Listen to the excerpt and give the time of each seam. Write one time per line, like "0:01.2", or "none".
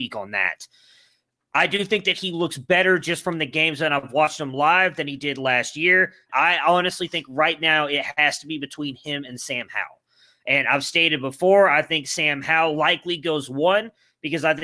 0:06.3

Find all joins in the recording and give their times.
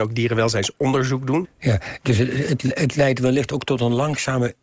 0:01.4

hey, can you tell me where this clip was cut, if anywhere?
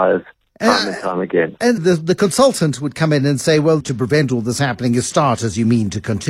0:01.8
0:03.8

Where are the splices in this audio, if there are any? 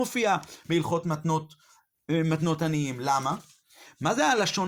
none

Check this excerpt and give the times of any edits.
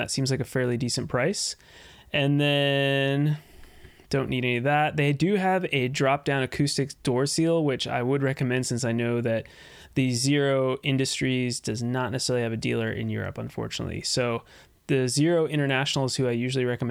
none

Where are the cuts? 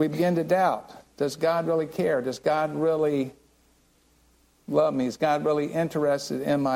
none

